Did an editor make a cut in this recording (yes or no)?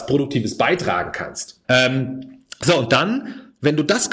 yes